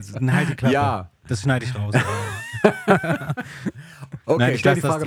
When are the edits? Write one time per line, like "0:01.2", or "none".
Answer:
none